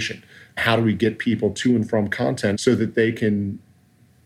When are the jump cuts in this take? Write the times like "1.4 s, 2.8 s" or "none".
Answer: 2.5 s